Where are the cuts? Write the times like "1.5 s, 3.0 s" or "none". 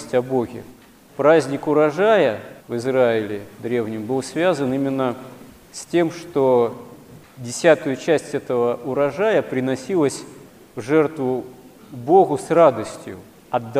1.1 s, 2.6 s